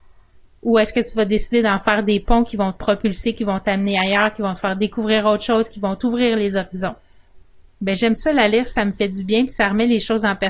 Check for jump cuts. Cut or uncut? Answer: cut